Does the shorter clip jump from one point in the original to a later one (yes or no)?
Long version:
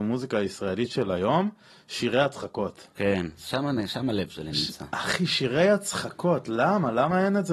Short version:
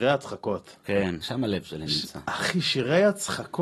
yes